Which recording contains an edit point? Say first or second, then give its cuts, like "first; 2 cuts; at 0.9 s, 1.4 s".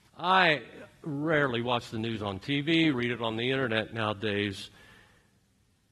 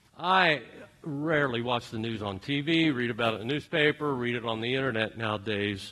first; 1 cut; at 2.9 s